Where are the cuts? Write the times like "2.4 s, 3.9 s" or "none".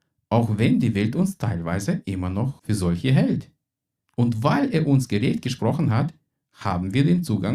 4.1 s